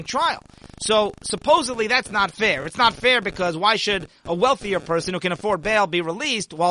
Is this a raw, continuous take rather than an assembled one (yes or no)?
yes